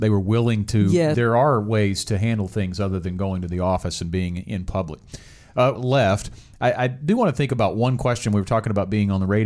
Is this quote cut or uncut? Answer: cut